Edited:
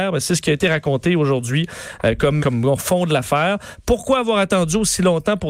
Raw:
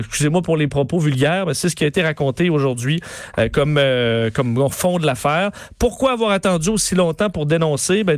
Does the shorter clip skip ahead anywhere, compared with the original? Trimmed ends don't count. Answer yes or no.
yes